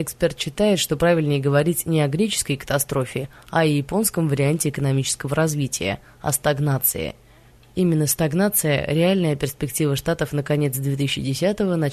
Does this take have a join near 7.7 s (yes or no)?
no